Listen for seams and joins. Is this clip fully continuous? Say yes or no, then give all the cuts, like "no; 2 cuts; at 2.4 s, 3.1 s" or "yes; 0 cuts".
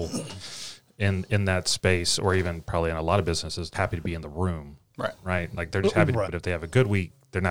no; 2 cuts; at 3.7 s, 6.3 s